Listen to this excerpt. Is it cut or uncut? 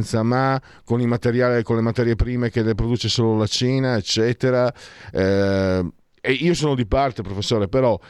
uncut